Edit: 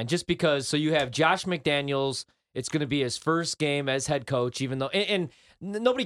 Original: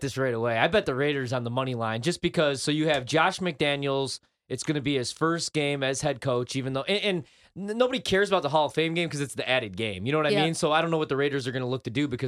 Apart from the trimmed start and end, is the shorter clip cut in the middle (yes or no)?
no